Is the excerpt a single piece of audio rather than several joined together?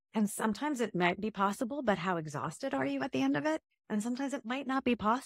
yes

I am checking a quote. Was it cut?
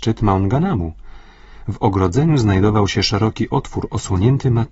no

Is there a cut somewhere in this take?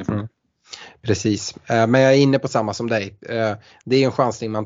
no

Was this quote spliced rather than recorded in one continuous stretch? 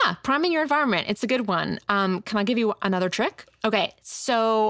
yes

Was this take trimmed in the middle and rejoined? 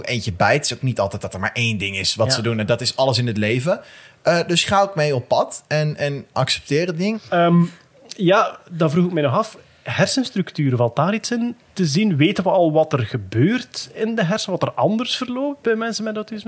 no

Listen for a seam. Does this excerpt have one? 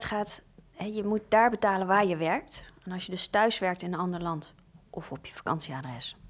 no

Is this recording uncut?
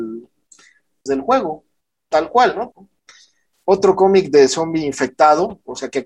no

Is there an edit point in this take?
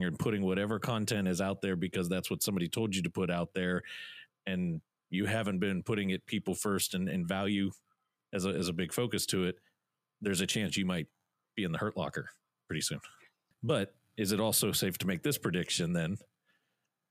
yes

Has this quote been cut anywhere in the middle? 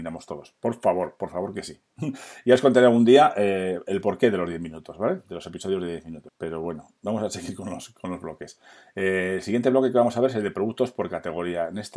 yes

